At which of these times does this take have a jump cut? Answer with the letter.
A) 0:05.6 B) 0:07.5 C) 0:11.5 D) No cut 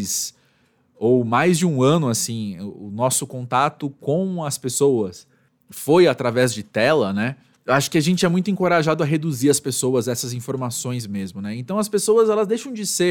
D